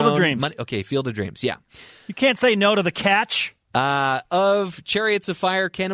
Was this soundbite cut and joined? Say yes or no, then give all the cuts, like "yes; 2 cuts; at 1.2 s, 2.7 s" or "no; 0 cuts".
no; 0 cuts